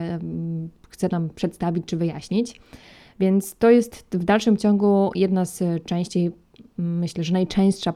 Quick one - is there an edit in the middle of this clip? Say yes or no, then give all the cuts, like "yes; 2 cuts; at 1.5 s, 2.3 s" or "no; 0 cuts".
no; 0 cuts